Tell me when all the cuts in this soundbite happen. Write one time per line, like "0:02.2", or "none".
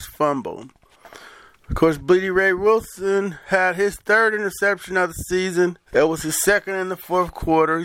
0:05.9

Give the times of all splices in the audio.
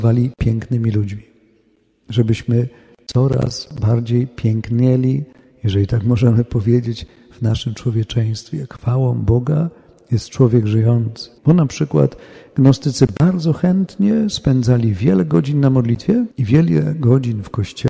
0:11.4
0:16.3

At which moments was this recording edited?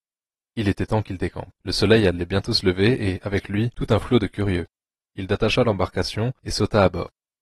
none

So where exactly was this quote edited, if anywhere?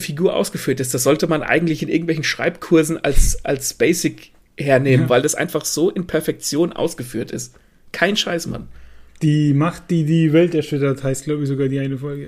none

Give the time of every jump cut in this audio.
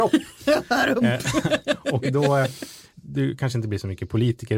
0:02.9

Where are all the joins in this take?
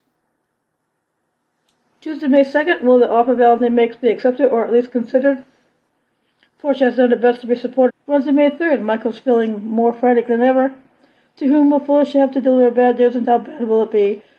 0:07.9
0:13.2

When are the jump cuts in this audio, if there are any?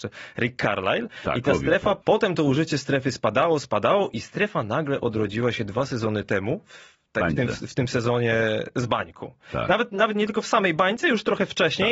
0:02.0

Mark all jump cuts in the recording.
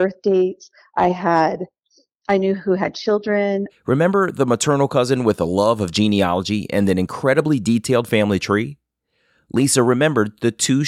0:03.7

